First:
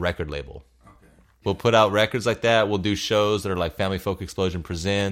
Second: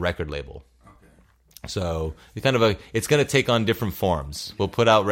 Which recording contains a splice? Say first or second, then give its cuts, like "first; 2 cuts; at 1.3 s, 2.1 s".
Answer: first; 1 cut; at 1.4 s